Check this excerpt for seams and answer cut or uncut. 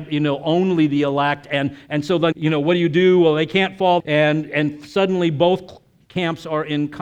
cut